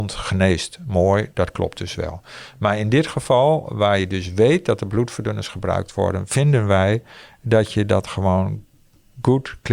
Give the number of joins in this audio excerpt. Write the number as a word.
zero